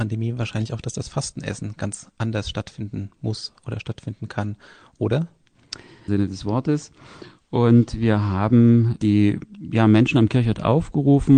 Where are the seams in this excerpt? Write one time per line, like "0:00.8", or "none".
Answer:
0:06.1